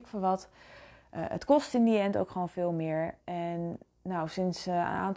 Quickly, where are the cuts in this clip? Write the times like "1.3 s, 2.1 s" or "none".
3.2 s